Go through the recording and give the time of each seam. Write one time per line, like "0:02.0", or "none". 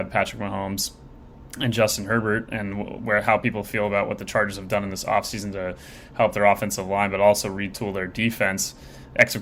none